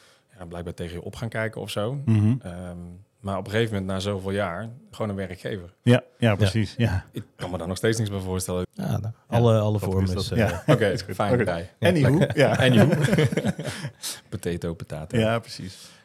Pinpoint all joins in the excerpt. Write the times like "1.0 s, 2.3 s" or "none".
4.9 s, 8.6 s, 11.5 s